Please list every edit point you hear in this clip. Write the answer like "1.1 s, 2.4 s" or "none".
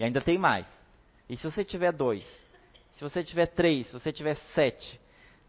1.2 s